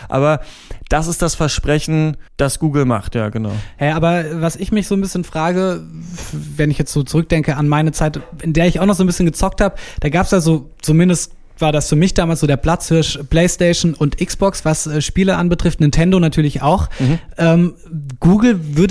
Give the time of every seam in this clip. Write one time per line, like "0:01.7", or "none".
0:02.3